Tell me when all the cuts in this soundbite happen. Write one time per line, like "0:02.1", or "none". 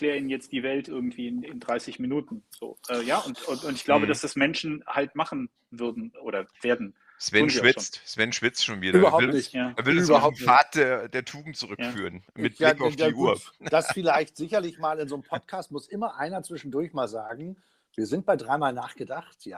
none